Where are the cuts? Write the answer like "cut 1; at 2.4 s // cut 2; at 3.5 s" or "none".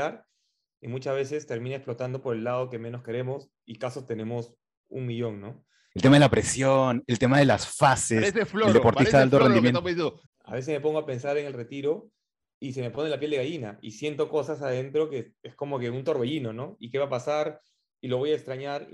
cut 1; at 5.9 s // cut 2; at 10.3 s

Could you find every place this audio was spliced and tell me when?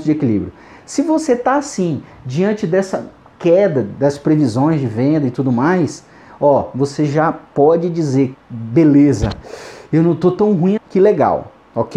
cut 1; at 8.3 s // cut 2; at 10.8 s

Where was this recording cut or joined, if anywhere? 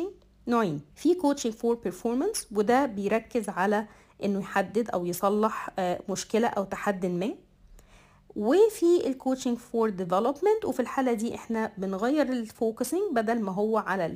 cut 1; at 0.9 s

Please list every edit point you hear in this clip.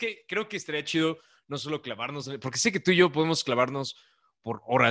none

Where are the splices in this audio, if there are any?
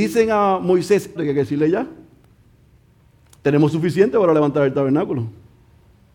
cut 1; at 1.2 s

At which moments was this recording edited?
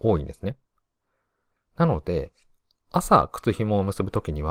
cut 1; at 1.6 s

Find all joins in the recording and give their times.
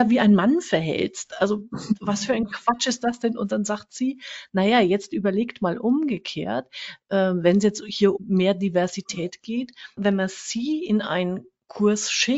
cut 1; at 8.2 s // cut 2; at 10.0 s

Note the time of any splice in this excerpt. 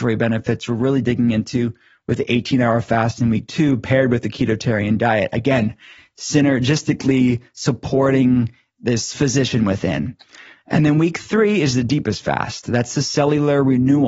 none

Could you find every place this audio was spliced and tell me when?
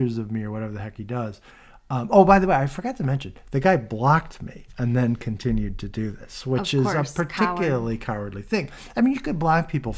none

